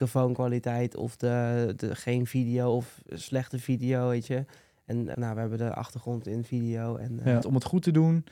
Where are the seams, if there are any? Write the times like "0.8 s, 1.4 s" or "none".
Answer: 5.1 s, 7.4 s